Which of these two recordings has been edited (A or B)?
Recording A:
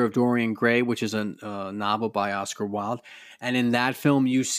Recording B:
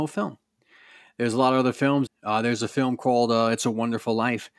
B